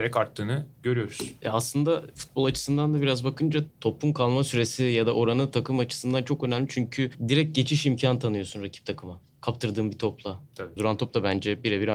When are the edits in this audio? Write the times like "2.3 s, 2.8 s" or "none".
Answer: 10.8 s